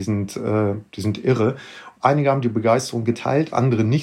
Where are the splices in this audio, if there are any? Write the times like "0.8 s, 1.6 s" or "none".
1.9 s